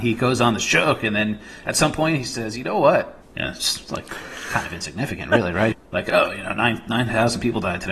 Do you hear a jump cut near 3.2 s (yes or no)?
yes